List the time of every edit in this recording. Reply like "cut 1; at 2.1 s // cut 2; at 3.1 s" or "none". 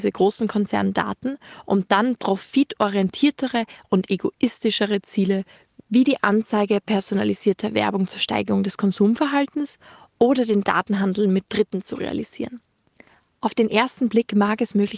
none